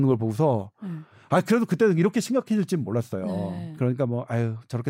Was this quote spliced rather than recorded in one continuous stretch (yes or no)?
no